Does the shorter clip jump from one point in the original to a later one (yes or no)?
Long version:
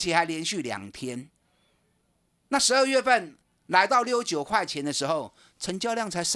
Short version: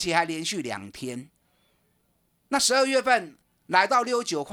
no